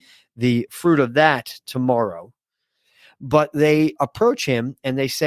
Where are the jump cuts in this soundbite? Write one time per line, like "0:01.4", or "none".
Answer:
0:04.0